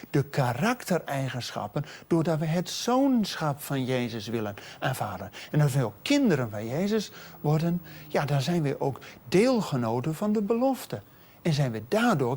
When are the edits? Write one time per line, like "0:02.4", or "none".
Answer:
none